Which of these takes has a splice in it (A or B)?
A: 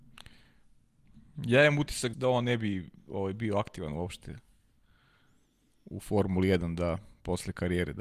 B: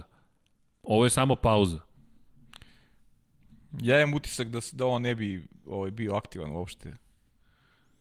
A